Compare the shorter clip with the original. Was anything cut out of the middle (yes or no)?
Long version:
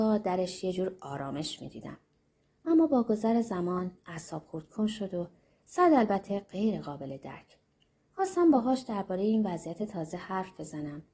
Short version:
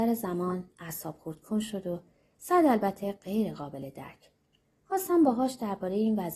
no